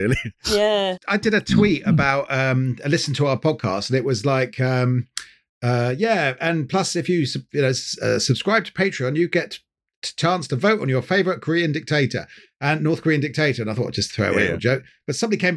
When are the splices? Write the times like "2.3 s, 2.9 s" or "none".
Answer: none